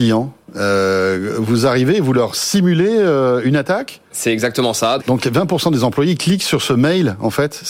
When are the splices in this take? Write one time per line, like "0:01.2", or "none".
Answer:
0:05.0

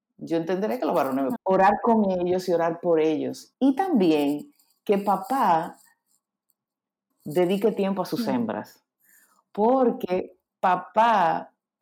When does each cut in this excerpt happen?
0:01.4
0:03.5
0:07.1

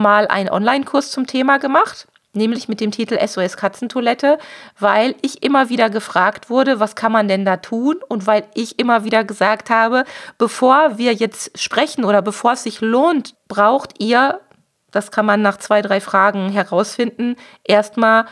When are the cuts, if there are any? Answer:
0:13.3

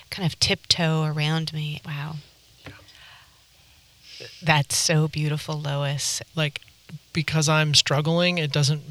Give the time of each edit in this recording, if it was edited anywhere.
0:01.8
0:06.3

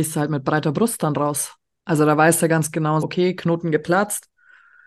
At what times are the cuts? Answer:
0:03.0

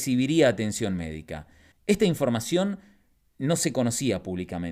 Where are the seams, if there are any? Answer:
0:01.7

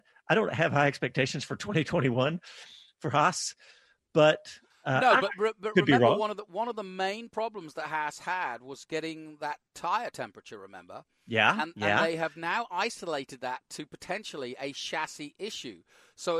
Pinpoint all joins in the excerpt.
none

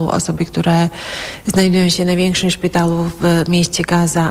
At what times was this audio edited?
none

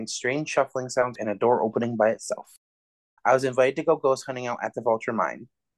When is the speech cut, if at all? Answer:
0:01.2
0:03.2

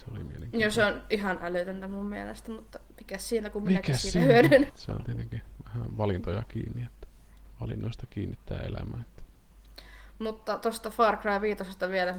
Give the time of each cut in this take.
0:04.7

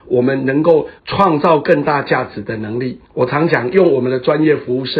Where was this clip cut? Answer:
0:01.0
0:03.0

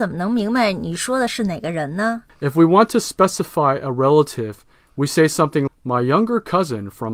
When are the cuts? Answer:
0:05.7

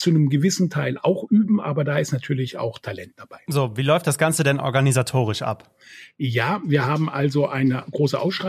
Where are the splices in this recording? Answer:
none

